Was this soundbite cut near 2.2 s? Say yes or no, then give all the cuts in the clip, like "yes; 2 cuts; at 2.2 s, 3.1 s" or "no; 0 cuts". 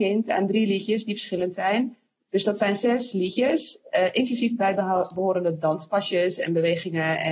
no; 0 cuts